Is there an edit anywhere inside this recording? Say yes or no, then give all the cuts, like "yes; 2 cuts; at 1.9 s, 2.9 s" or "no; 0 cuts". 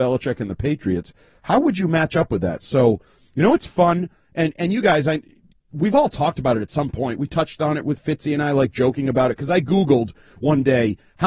no; 0 cuts